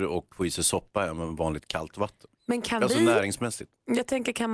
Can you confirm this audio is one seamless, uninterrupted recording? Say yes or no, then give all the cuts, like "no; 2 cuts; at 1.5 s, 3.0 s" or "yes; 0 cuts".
no; 1 cut; at 2.3 s